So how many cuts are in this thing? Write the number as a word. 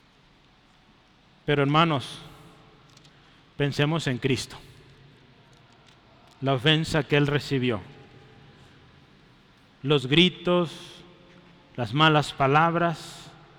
zero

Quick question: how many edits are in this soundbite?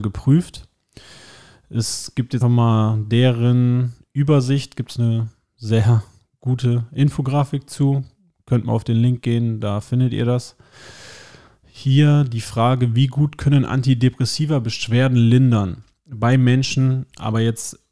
one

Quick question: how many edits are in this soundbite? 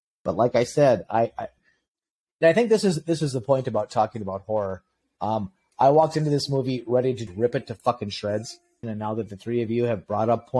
two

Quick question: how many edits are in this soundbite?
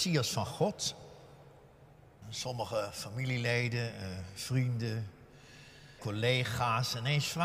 two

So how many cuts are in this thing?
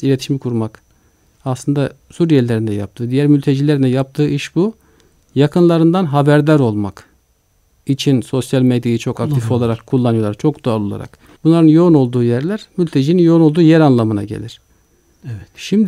two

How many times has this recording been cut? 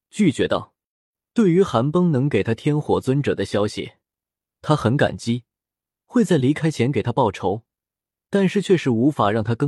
zero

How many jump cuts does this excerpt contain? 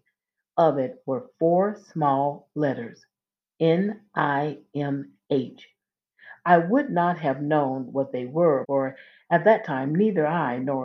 one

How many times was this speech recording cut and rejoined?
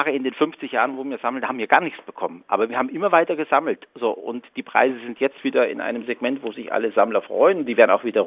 zero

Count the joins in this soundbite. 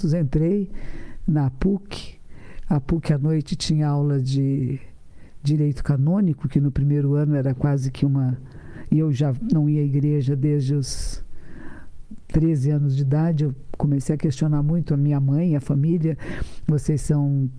zero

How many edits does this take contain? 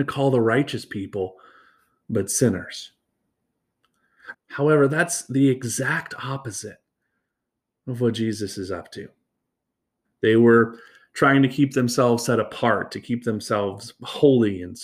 two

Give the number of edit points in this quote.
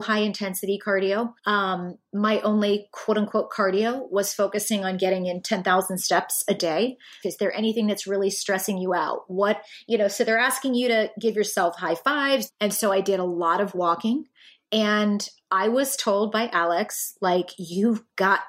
three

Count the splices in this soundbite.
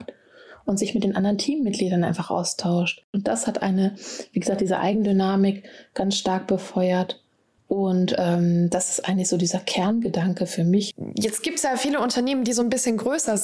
zero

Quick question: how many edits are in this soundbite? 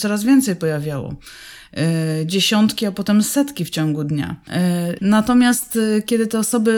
one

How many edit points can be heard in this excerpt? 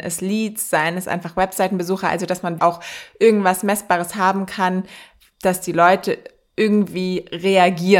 one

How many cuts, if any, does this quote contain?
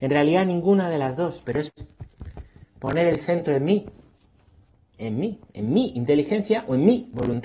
one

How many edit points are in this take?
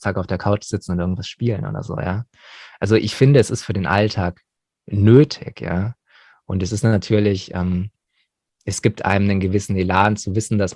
zero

